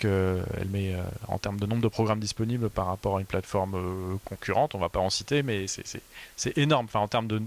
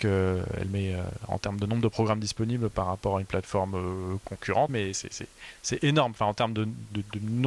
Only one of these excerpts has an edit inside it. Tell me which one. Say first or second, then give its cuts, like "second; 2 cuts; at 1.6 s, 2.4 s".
second; 1 cut; at 4.7 s